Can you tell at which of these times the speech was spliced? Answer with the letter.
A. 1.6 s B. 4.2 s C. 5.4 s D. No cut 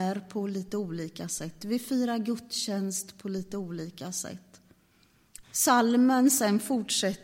C